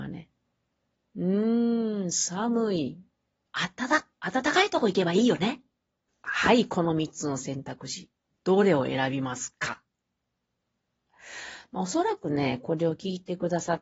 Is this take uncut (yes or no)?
no